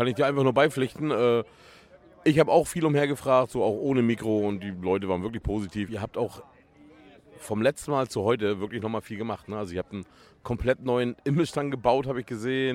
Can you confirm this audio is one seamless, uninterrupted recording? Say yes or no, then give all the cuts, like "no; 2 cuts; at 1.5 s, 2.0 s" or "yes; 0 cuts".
yes; 0 cuts